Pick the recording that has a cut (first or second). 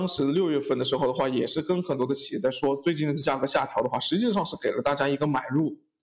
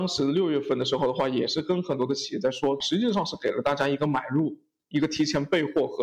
second